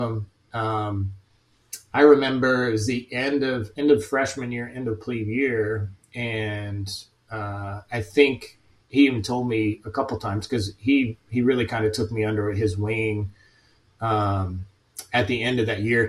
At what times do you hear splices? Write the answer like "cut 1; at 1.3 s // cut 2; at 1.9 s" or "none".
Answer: none